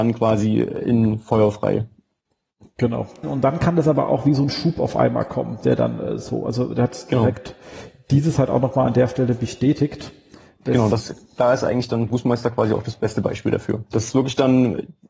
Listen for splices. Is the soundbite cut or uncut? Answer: cut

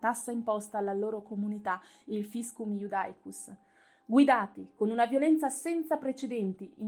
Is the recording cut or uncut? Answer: uncut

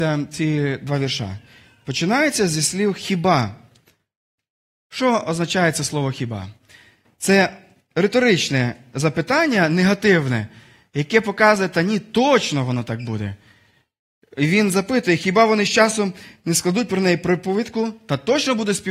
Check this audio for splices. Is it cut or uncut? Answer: uncut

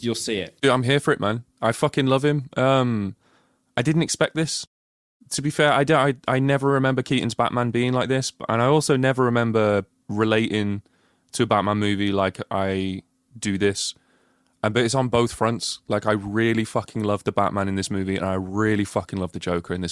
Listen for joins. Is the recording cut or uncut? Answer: uncut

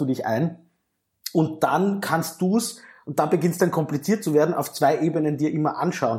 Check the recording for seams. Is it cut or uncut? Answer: uncut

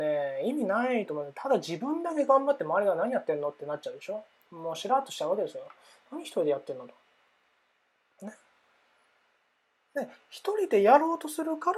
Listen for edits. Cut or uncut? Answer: uncut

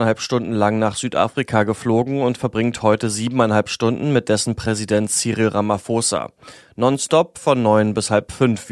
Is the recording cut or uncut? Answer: uncut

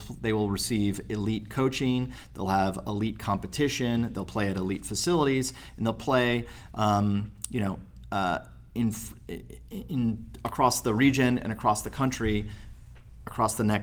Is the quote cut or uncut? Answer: uncut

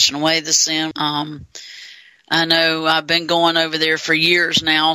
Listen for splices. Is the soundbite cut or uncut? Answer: cut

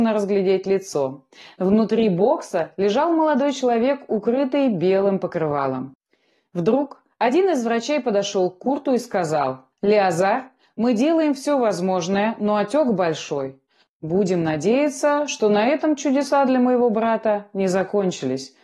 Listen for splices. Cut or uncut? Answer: cut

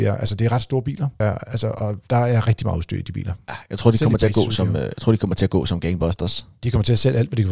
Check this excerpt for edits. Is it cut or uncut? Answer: cut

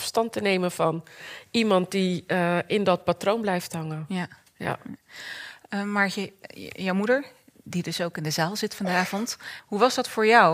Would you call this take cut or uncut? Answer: cut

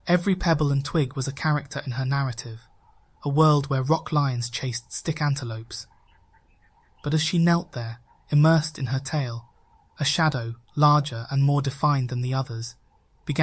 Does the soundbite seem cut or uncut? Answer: uncut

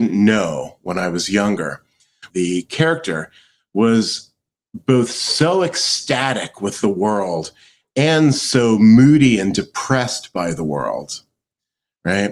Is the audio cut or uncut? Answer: cut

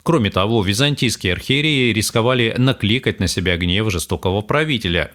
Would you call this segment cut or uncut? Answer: uncut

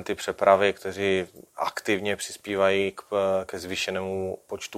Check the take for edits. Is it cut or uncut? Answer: uncut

